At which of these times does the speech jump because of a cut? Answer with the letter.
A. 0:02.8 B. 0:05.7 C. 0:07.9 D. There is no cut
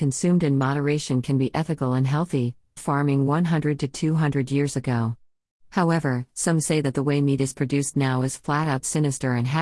A